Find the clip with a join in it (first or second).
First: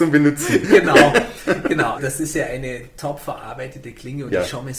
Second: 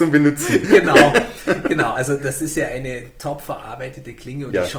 first